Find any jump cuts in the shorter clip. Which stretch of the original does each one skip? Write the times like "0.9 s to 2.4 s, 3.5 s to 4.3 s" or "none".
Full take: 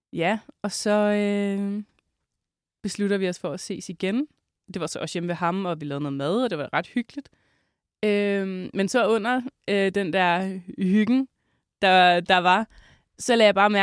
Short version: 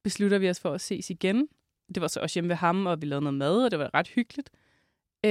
none